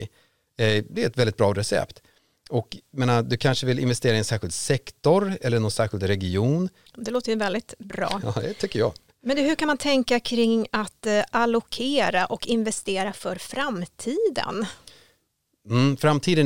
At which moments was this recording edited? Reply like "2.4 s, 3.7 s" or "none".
6.9 s